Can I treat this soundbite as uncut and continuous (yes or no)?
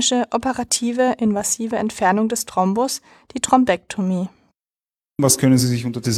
yes